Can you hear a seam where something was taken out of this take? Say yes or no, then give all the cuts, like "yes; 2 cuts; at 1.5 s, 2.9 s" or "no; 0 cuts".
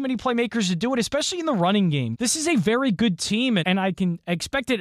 yes; 2 cuts; at 2.1 s, 3.6 s